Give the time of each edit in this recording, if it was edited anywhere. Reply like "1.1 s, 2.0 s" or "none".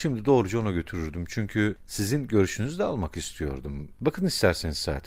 4.0 s

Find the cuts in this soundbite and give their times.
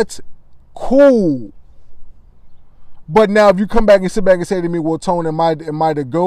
3.1 s

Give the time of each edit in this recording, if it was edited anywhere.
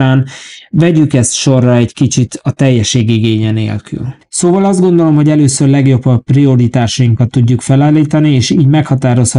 none

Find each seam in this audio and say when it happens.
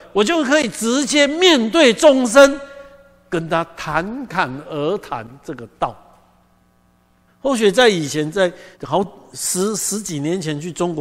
7.3 s, 8.7 s

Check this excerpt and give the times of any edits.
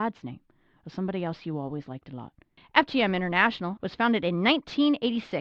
2.6 s, 3.8 s

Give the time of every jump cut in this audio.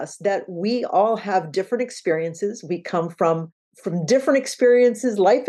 none

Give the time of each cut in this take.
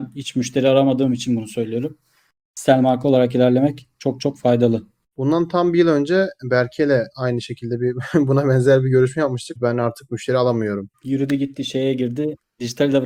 5.1 s, 9.6 s, 10.9 s

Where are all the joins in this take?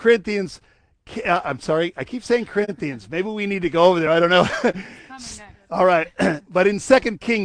none

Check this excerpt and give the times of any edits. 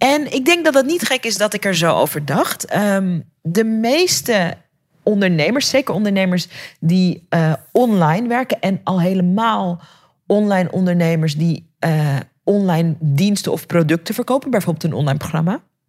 none

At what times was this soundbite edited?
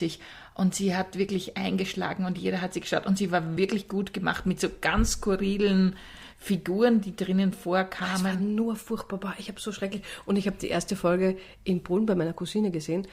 none

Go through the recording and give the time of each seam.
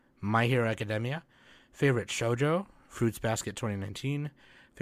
none

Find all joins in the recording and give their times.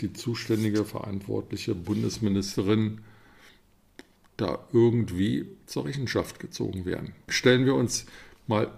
7.3 s

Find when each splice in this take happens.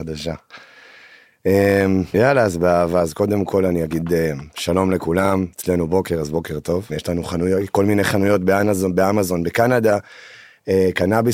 2.1 s, 6.9 s

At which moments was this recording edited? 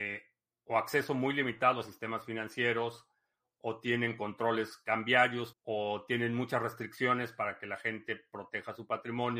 5.5 s

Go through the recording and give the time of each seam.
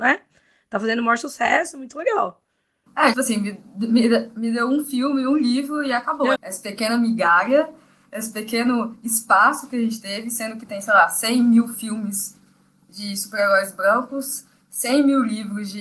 3.1 s, 6.4 s

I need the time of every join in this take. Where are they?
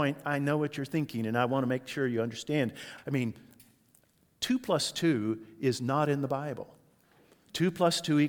3.0 s

